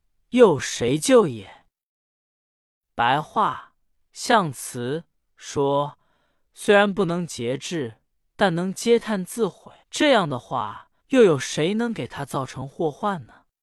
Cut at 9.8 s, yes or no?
yes